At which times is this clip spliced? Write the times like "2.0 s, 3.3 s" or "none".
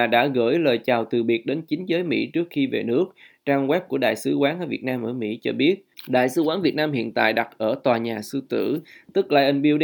none